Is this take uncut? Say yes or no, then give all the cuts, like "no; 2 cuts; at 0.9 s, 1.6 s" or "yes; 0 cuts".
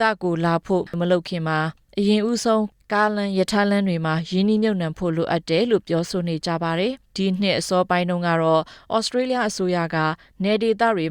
no; 1 cut; at 7.0 s